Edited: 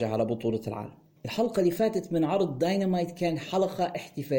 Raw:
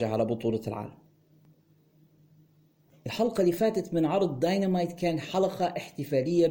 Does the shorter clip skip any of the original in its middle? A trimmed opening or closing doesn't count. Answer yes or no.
yes